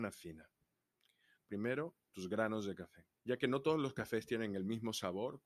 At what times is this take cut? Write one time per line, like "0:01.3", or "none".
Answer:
0:01.4
0:03.2